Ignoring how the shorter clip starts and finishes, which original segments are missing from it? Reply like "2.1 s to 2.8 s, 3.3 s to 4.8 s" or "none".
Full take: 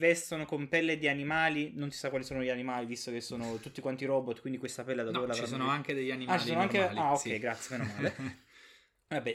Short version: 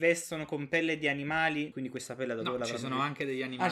1.7 s to 4.4 s